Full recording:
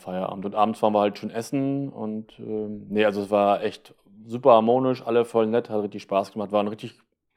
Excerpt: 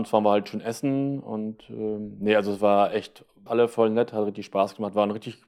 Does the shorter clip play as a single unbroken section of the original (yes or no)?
no